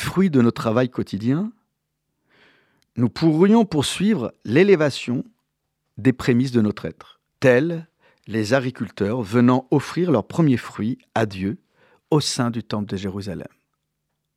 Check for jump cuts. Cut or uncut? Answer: cut